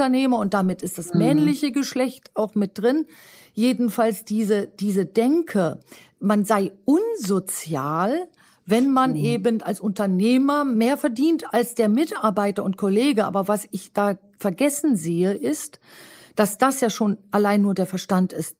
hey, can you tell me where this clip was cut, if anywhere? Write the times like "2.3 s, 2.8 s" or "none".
none